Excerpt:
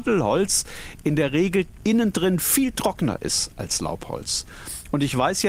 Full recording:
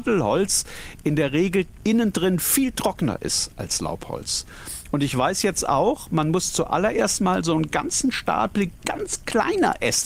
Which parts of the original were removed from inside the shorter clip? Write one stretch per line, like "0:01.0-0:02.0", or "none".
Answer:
none